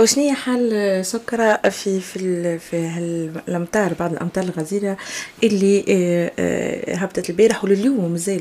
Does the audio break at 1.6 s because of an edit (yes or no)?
no